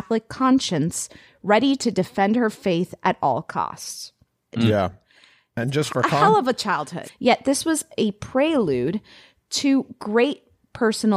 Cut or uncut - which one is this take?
cut